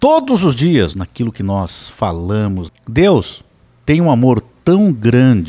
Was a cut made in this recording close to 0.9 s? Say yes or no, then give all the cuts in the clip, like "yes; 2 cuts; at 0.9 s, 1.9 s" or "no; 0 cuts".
yes; 2 cuts; at 0.9 s, 2.7 s